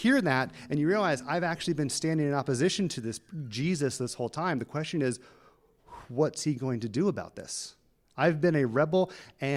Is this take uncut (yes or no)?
yes